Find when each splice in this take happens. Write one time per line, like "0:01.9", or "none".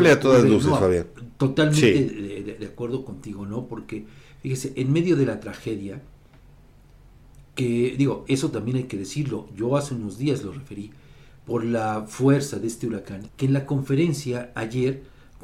0:08.3
0:13.3